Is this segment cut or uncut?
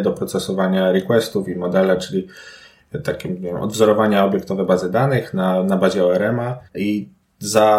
cut